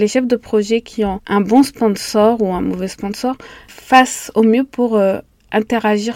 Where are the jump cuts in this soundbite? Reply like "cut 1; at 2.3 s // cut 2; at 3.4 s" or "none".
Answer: none